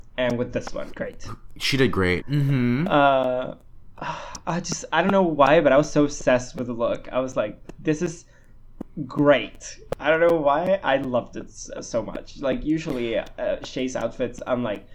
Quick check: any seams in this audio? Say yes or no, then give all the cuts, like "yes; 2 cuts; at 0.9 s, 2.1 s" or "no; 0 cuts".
yes; 2 cuts; at 0.9 s, 2.2 s